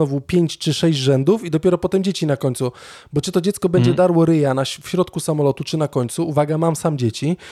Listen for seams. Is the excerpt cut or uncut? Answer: uncut